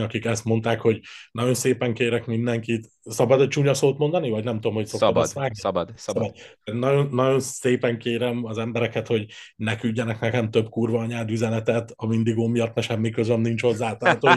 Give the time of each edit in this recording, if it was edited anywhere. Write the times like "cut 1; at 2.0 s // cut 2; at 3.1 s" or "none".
none